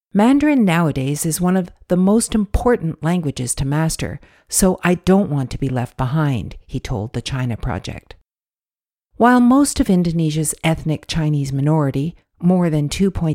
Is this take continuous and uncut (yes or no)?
yes